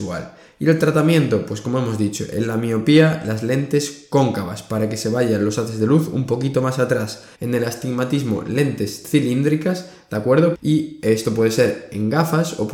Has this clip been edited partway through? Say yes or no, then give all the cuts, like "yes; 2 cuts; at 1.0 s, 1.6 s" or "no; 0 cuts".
yes; 2 cuts; at 7.3 s, 10.5 s